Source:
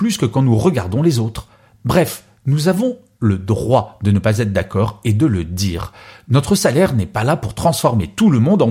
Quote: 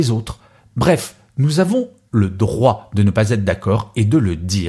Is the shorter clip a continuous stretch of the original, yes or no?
yes